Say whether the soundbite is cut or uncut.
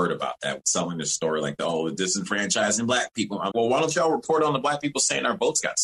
cut